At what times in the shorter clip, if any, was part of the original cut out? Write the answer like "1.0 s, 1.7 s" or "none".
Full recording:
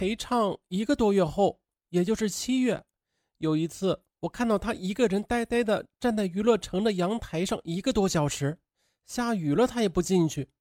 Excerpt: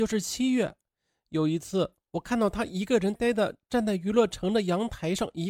3.2 s